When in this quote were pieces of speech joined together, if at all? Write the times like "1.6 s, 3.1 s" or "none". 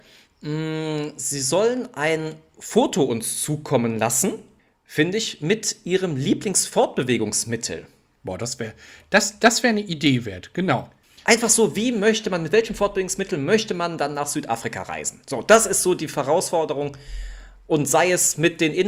none